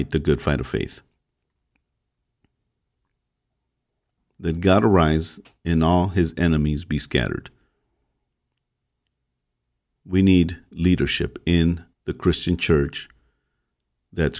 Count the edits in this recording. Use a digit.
2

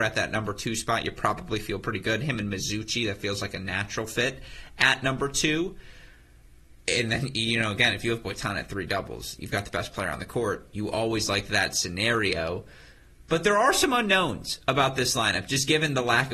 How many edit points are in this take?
0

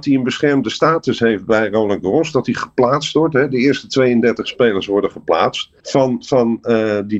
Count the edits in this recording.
1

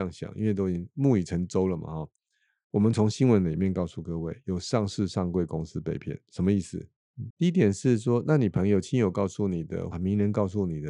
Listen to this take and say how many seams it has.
2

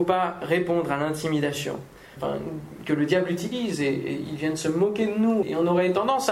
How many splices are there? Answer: 2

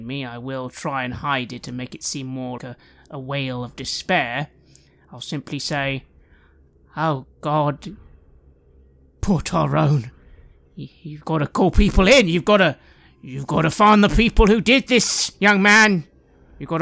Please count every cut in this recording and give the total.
1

